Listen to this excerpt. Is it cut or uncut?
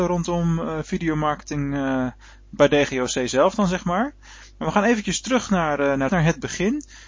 cut